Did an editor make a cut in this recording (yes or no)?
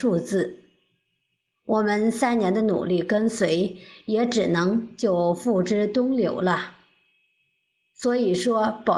no